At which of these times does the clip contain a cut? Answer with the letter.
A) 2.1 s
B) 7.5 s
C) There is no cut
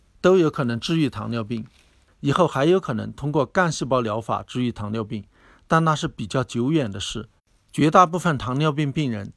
A